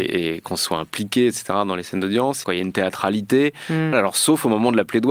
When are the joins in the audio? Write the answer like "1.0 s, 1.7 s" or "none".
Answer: 2.4 s, 3.9 s